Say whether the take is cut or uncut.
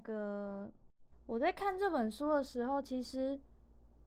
cut